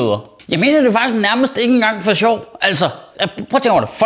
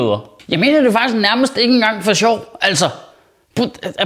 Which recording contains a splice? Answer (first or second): first